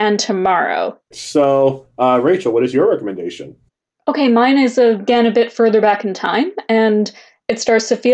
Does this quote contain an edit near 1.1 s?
yes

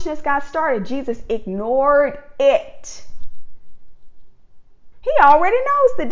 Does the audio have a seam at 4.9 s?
yes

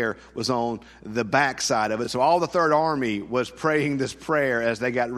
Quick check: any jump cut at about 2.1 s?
no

